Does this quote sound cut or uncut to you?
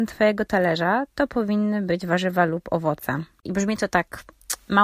cut